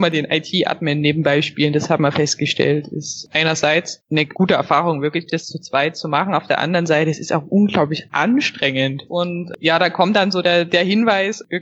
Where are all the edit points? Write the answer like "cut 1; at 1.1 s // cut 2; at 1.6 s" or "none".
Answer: cut 1; at 9.1 s